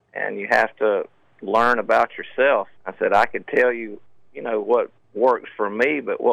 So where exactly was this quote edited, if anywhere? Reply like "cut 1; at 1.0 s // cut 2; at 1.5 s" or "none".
cut 1; at 2.8 s